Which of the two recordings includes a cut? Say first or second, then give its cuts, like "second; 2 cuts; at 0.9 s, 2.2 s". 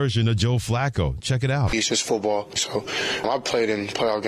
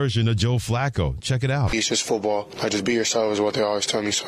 first; 1 cut; at 2.6 s